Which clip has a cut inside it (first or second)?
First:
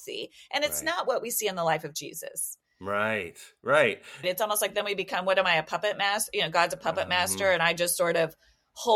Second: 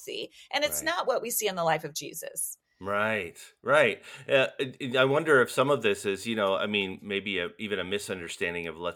first